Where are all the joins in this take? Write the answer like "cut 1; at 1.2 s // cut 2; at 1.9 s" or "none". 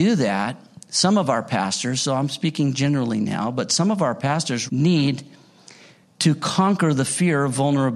cut 1; at 4.7 s